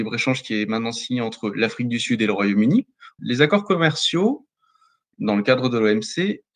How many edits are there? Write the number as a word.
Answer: two